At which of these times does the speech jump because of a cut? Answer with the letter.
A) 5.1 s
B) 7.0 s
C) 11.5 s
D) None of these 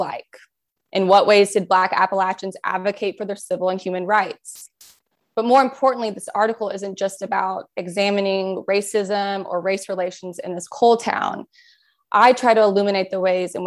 D